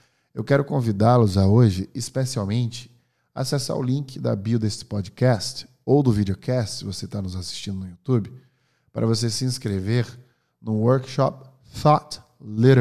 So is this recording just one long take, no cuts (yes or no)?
yes